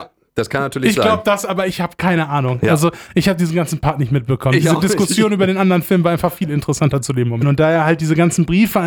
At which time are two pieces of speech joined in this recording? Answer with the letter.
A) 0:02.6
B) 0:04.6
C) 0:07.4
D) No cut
C